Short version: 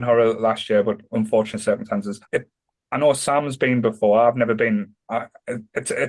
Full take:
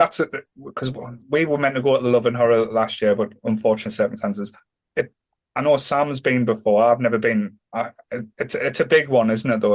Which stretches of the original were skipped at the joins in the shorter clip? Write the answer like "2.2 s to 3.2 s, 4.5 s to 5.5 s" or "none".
4.6 s to 4.9 s